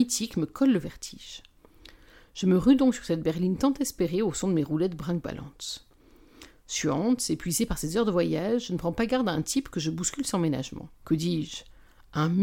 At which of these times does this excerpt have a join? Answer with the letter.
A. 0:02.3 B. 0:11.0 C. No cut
B